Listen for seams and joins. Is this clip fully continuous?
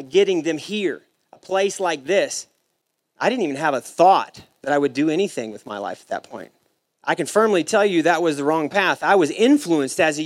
no; 1 cut; at 6.9 s

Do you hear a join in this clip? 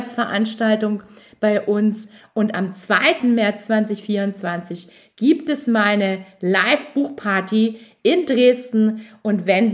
yes; 1 cut; at 3.2 s

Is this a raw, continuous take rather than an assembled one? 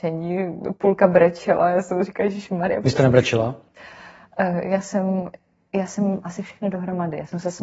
yes; 0 cuts

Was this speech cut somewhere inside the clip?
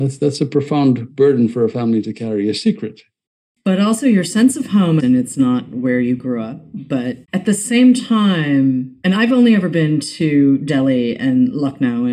yes; 3 cuts; at 5.0 s, 7.2 s, 9.0 s

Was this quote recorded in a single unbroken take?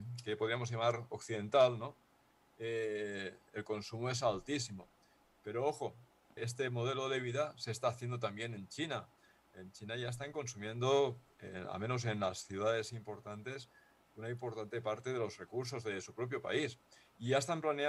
no; 1 cut; at 6.4 s

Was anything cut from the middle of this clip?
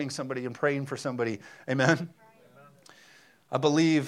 no; 0 cuts

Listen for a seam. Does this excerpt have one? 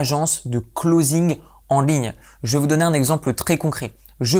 no; 0 cuts

